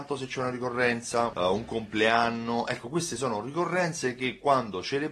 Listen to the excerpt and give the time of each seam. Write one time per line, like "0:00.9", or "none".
0:01.3